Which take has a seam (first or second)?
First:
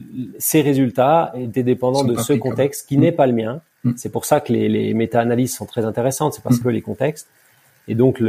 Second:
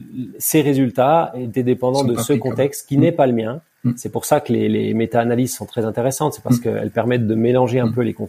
first